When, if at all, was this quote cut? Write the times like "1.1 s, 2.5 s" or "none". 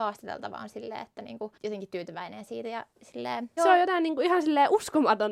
1.6 s, 3.6 s